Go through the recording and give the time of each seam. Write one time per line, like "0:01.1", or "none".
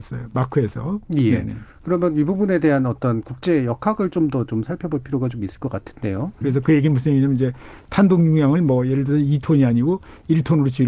0:01.1
0:06.4